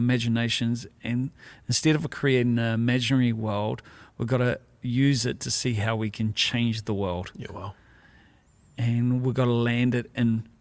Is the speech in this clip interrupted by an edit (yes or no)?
no